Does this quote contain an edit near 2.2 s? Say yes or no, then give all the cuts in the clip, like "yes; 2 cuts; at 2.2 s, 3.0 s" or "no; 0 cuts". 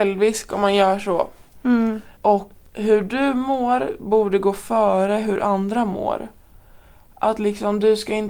yes; 1 cut; at 2.2 s